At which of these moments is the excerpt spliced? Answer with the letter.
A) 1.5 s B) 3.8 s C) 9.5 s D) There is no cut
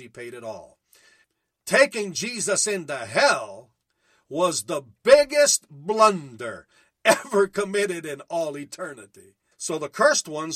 C